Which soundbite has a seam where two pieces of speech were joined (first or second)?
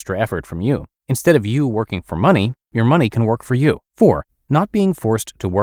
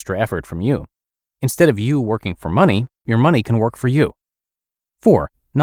first